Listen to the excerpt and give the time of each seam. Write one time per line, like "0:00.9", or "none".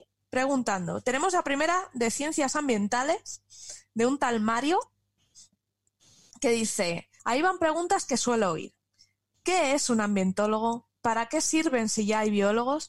0:07.2